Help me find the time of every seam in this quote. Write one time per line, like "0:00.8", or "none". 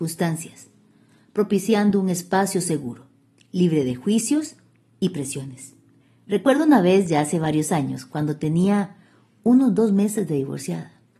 none